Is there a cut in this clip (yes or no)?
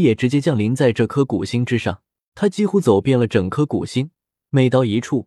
yes